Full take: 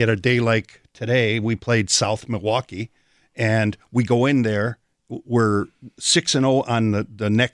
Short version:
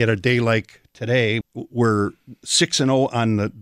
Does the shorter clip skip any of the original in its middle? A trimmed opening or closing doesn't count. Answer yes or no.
yes